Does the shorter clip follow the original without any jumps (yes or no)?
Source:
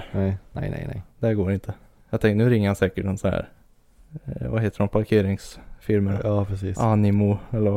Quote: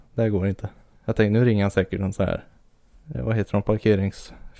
no